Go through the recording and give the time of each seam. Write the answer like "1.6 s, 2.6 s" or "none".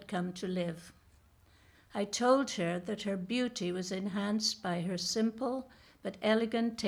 1.7 s